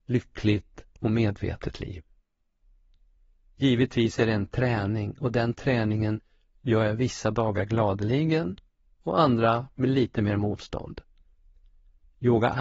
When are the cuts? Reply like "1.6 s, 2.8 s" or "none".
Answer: none